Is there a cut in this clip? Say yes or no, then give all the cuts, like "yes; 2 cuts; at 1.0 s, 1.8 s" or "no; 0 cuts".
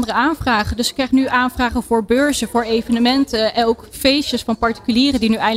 no; 0 cuts